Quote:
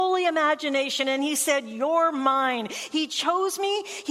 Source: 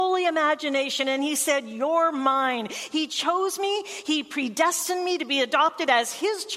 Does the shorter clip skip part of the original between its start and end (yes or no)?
no